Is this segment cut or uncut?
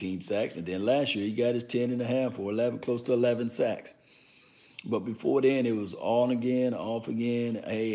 uncut